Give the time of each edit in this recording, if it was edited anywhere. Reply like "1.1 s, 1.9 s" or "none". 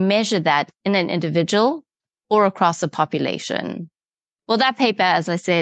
4.4 s